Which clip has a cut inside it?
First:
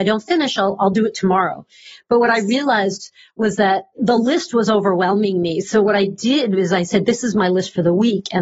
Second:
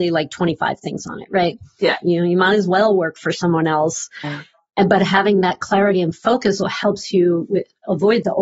second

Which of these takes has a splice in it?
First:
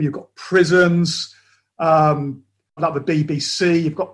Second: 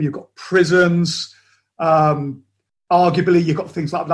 first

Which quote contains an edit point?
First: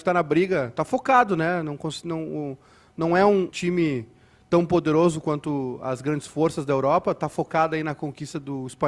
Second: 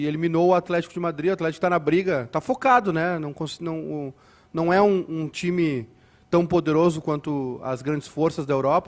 first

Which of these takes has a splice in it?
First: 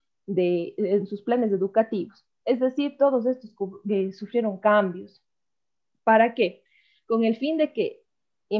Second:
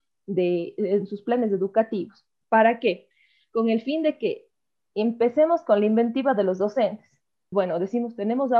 second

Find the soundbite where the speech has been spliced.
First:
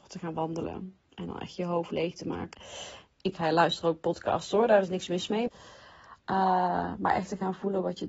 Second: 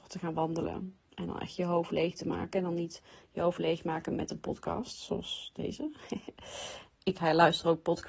first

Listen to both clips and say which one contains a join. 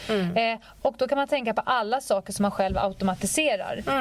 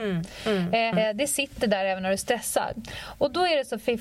second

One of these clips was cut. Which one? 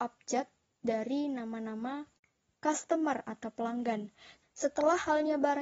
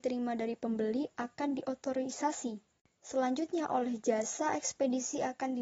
first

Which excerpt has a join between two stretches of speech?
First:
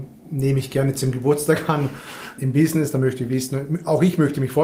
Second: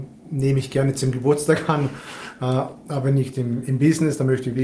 first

